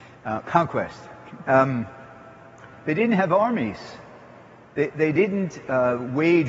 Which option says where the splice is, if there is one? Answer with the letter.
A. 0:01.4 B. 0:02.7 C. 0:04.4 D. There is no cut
A